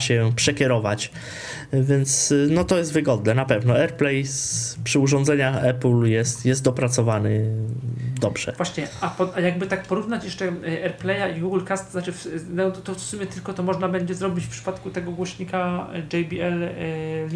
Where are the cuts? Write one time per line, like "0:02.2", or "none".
none

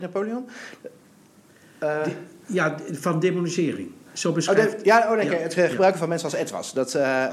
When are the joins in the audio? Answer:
none

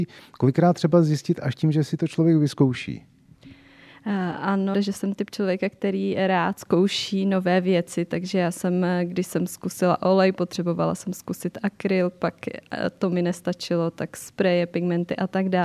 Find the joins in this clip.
0:04.7

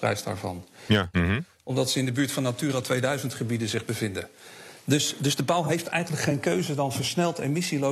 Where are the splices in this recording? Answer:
0:01.1

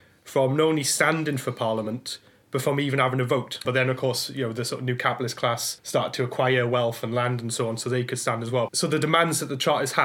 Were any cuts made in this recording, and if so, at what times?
0:03.6
0:08.7

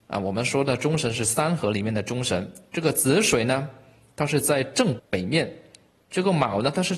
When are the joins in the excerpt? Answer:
0:05.0

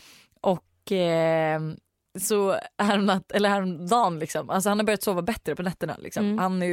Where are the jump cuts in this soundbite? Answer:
none

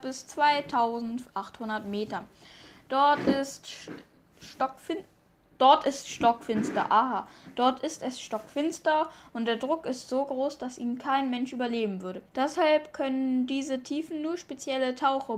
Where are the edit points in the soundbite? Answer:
0:12.3

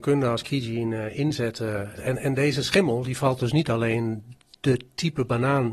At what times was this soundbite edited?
0:02.0

